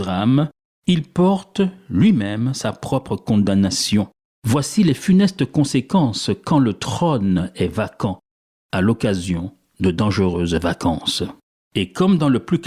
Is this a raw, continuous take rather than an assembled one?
no; 2 cuts; at 4.4 s, 11.6 s

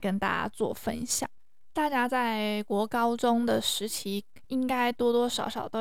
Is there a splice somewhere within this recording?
no; 0 cuts

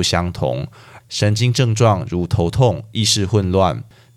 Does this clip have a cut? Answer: yes; 1 cut; at 1.0 s

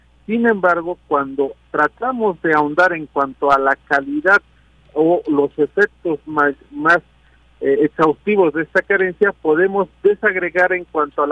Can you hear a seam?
no; 0 cuts

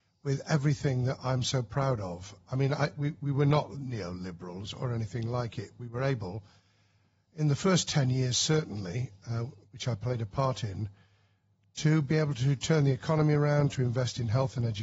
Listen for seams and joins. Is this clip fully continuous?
yes; 0 cuts

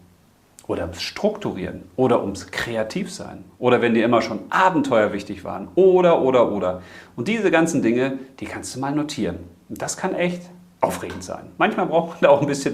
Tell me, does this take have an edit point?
no; 0 cuts

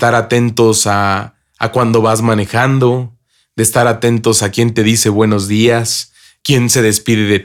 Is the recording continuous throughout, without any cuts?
no; 1 cut; at 6.4 s

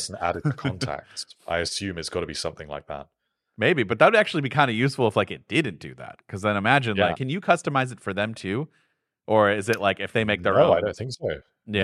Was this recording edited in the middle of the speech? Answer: yes; 1 cut; at 7.1 s

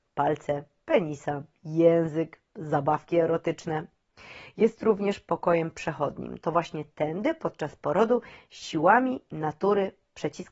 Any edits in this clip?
no; 0 cuts

